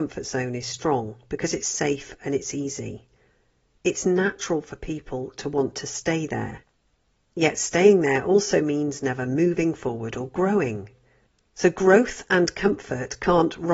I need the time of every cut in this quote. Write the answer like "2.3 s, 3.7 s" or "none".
none